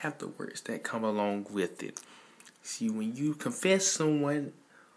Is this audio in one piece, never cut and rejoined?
yes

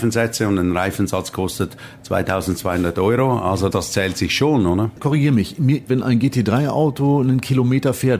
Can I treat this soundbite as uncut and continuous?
no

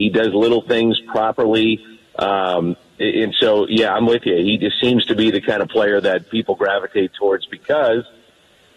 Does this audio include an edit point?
no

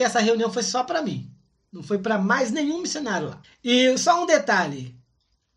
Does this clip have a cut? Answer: yes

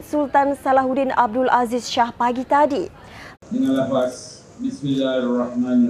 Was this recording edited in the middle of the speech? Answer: yes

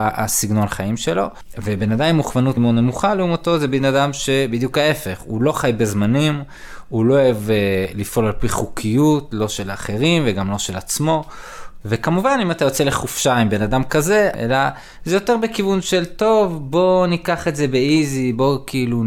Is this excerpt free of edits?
no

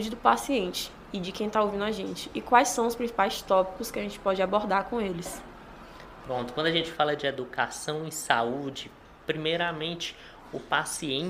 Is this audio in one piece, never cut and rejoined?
yes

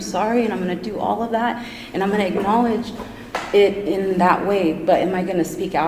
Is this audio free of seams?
yes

